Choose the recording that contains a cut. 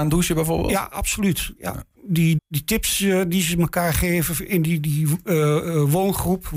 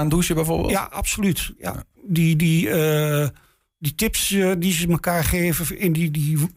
first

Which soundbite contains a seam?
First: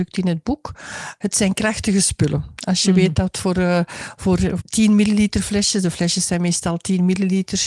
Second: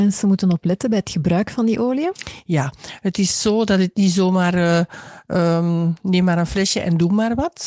first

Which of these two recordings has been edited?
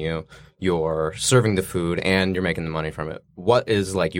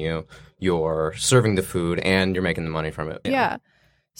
second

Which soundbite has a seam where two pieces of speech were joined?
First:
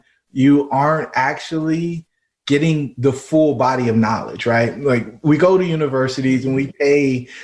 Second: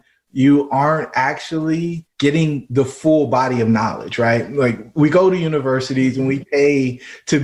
second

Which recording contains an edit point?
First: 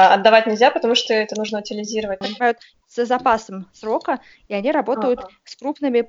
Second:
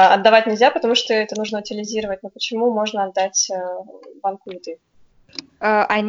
first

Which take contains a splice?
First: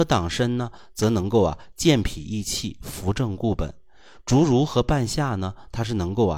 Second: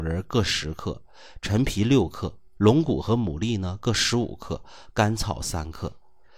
second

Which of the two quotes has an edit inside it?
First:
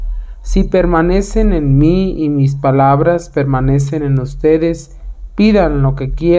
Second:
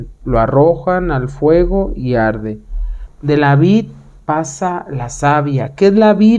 second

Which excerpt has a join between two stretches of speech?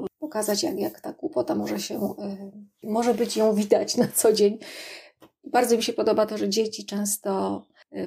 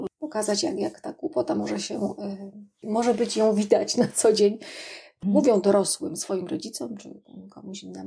second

